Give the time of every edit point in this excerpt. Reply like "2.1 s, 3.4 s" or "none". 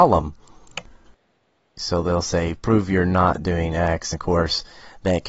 1.8 s, 4.1 s